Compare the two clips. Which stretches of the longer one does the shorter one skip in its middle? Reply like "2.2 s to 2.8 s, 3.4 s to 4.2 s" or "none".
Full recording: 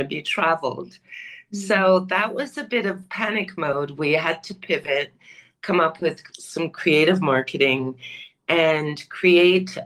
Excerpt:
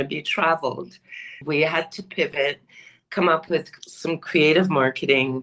1.4 s to 3.9 s